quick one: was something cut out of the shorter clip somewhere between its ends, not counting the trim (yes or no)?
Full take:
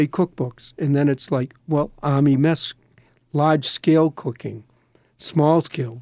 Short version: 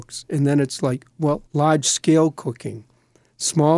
yes